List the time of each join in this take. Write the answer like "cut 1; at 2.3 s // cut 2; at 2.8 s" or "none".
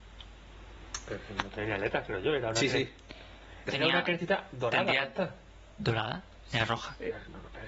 cut 1; at 3.7 s